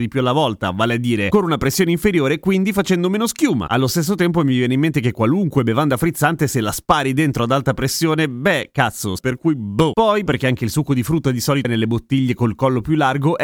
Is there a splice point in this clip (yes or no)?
yes